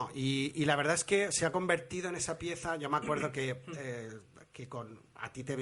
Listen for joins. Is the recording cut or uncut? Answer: uncut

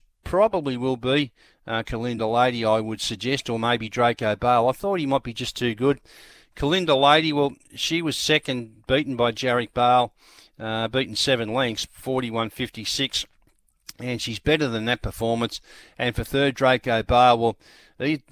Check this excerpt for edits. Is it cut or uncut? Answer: cut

